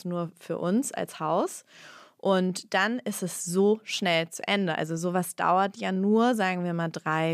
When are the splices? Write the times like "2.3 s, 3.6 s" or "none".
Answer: none

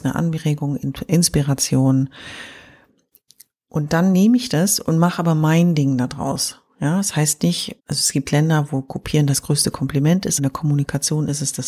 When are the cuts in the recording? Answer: 7.8 s, 10.4 s

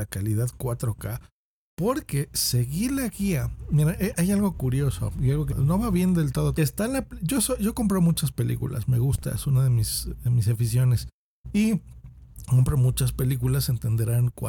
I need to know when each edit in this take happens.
5.5 s, 6.5 s

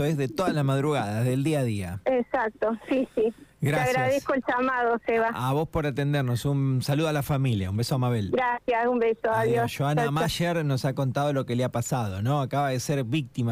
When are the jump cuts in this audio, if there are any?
none

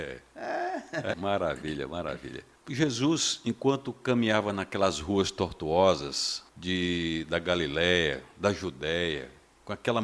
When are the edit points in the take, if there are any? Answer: 1.1 s, 2.6 s, 6.5 s

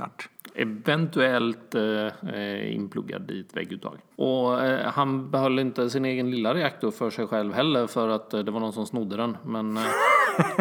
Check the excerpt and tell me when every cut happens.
4.1 s

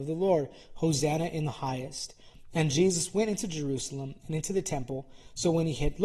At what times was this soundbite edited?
none

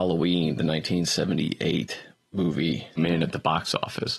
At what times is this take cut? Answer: 3.0 s

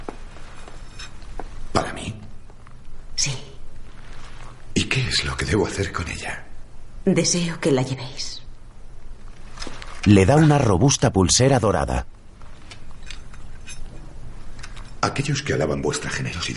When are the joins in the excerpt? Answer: none

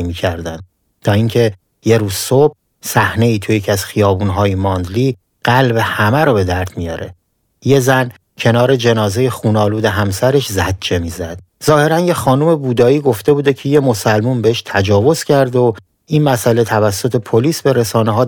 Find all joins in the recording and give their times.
11.5 s

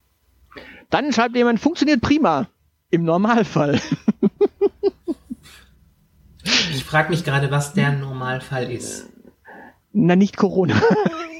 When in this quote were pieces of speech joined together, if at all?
none

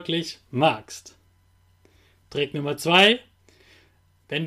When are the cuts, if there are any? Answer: none

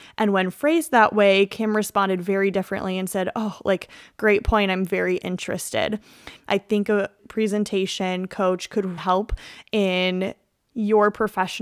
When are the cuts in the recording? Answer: 6.4 s, 9.0 s

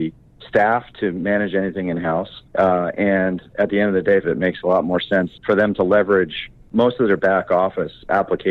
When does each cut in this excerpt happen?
2.5 s, 4.2 s, 5.4 s

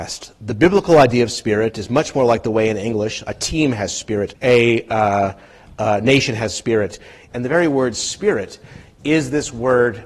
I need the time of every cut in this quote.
4.3 s, 7.3 s

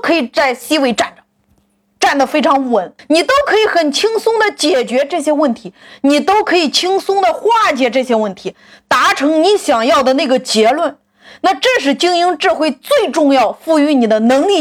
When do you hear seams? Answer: 3.0 s

